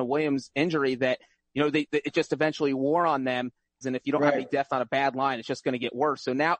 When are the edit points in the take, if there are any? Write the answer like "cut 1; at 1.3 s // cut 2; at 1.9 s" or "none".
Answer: cut 1; at 3.8 s